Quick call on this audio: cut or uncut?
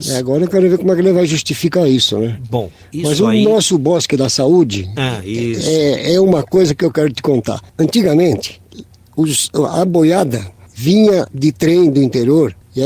uncut